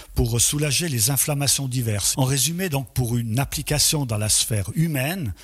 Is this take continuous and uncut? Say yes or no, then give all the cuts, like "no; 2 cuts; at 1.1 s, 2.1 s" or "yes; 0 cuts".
no; 1 cut; at 2.1 s